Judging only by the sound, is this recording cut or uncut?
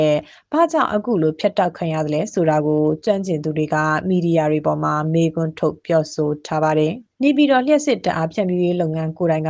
cut